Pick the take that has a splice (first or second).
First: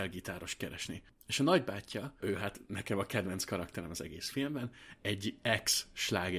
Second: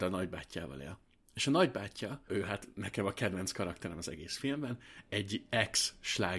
first